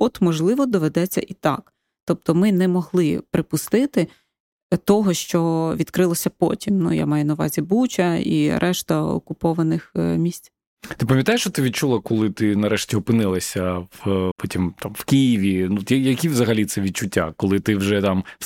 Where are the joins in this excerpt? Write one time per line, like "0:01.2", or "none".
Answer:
0:14.3